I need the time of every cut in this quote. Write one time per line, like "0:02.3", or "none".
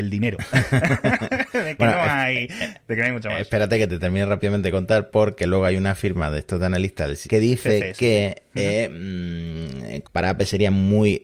0:07.2
0:10.0